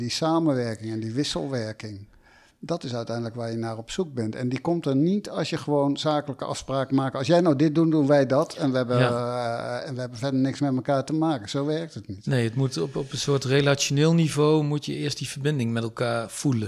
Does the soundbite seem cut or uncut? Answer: uncut